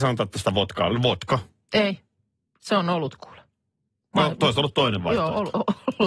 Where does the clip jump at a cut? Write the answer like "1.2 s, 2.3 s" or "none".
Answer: none